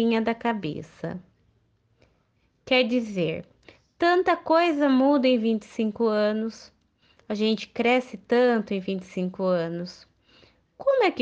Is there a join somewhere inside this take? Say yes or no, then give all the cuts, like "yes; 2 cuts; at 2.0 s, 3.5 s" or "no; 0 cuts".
no; 0 cuts